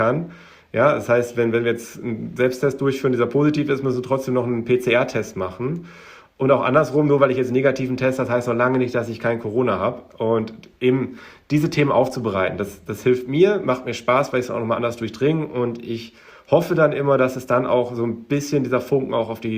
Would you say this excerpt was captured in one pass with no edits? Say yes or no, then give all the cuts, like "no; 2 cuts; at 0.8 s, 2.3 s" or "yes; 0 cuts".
yes; 0 cuts